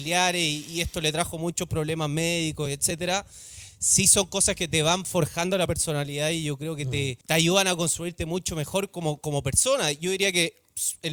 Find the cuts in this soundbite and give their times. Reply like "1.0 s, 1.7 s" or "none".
7.2 s